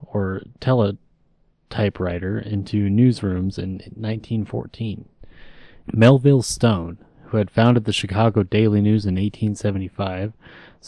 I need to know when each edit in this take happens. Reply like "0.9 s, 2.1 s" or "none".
5.8 s